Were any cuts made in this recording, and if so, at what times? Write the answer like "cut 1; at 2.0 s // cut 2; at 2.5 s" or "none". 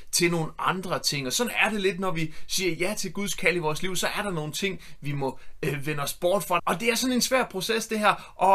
cut 1; at 6.6 s